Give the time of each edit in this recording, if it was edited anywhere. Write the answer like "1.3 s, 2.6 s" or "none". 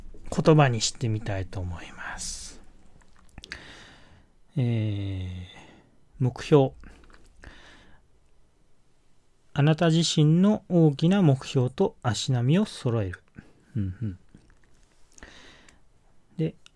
none